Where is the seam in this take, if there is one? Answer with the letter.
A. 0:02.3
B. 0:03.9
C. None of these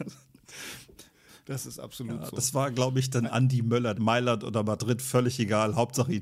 B